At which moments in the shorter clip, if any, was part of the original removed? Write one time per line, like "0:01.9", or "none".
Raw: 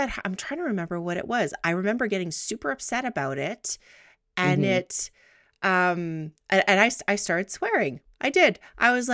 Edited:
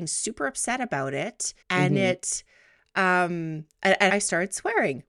0:01.6
0:04.1

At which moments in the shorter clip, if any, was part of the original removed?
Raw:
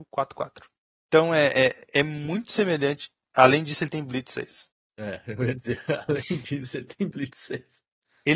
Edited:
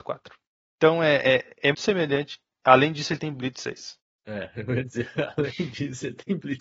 0:01.7

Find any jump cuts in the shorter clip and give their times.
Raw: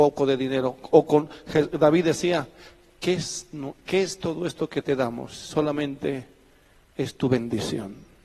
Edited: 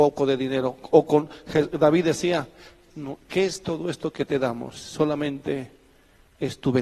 0:02.9

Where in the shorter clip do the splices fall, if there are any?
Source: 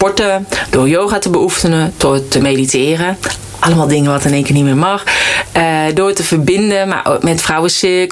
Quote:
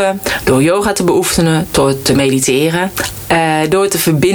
0:03.2

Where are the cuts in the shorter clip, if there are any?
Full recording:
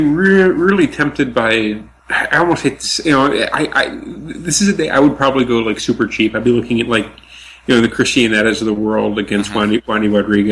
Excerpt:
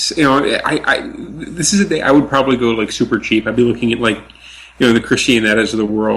none

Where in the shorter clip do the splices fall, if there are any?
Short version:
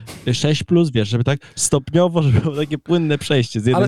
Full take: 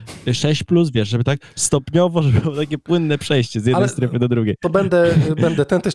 none

